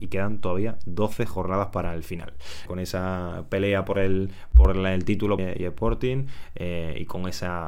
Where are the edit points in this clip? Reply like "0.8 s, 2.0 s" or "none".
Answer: 2.7 s, 5.4 s